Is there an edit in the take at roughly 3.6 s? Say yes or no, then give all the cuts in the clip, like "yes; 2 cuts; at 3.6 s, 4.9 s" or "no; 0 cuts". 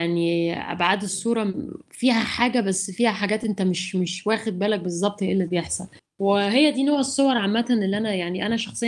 no; 0 cuts